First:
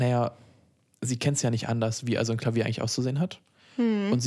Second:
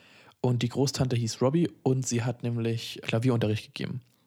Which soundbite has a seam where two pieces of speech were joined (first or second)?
second